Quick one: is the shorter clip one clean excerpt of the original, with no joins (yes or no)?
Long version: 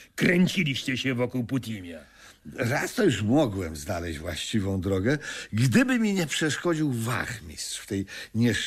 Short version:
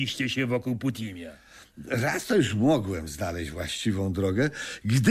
yes